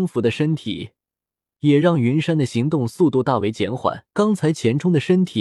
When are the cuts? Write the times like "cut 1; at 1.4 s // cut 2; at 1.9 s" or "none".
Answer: cut 1; at 4.1 s